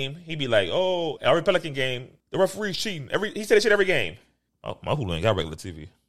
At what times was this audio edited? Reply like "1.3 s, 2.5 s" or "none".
1.2 s, 2.2 s, 4.5 s